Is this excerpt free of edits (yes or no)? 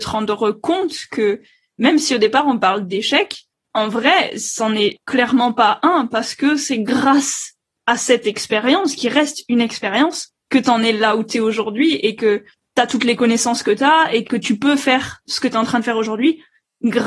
yes